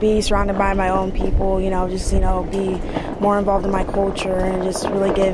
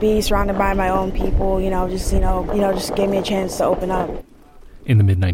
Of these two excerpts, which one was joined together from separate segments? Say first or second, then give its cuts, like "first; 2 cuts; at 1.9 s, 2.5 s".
second; 2 cuts; at 2.5 s, 3.6 s